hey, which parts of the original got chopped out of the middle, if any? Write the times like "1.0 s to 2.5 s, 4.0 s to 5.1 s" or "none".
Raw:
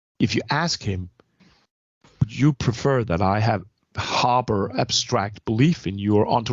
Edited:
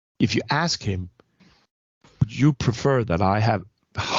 none